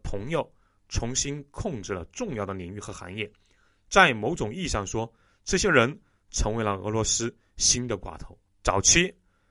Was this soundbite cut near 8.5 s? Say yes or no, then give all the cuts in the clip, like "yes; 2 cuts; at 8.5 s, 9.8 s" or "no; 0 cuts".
yes; 1 cut; at 8.5 s